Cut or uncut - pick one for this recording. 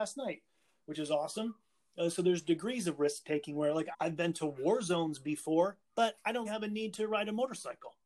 cut